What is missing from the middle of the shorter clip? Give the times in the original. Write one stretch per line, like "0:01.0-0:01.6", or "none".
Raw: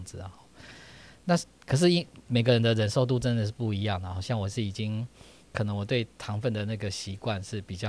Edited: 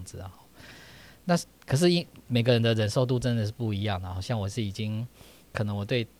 none